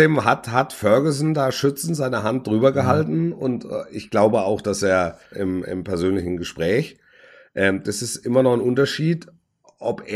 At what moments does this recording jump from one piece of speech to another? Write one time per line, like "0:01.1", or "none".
0:05.3
0:07.8

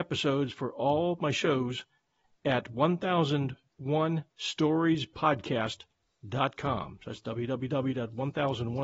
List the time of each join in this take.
none

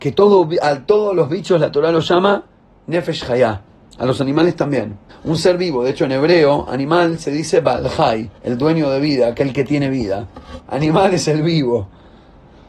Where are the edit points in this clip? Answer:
0:05.1
0:08.4
0:10.7

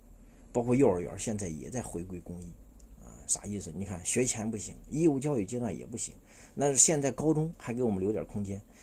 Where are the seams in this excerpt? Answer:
0:03.7

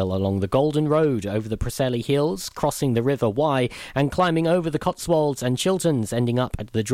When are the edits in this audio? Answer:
none

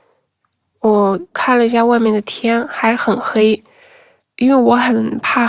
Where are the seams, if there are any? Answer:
none

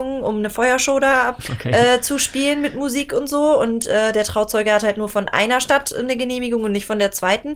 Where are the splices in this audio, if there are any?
0:01.5

